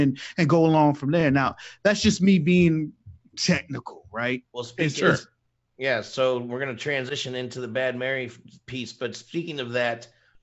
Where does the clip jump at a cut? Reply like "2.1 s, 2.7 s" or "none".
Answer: none